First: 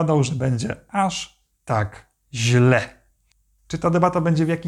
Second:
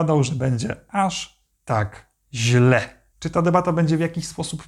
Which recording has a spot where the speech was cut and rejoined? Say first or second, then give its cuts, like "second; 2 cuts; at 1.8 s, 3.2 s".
second; 1 cut; at 3.1 s